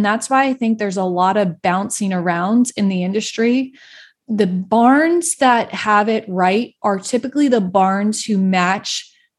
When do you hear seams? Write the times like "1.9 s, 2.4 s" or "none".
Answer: 4.2 s